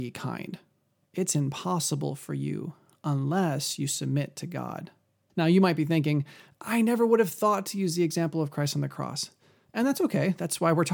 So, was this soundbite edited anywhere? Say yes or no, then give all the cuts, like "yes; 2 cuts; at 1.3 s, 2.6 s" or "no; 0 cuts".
yes; 1 cut; at 5.3 s